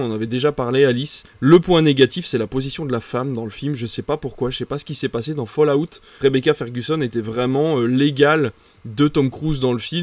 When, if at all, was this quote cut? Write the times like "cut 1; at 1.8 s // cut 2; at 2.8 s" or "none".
none